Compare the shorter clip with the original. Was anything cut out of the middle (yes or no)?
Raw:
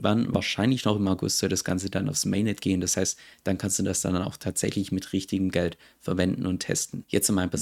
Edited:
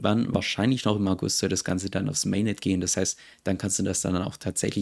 no